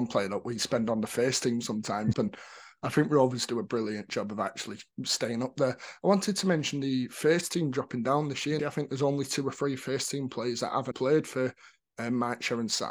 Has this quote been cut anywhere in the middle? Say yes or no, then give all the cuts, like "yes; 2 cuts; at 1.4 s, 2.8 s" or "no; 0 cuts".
yes; 3 cuts; at 2.1 s, 8.6 s, 10.9 s